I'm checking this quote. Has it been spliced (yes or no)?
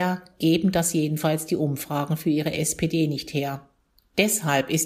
yes